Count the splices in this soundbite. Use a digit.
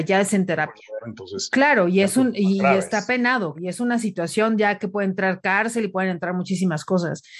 2